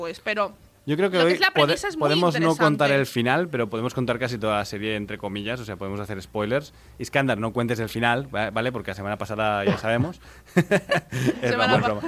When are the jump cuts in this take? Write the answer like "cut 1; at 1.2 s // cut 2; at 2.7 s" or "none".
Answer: none